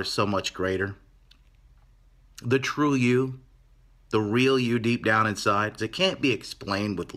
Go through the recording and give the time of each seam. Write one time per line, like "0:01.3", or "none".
0:05.8